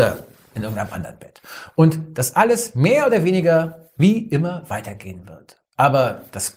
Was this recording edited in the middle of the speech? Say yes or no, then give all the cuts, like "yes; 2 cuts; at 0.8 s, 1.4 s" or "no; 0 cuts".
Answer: no; 0 cuts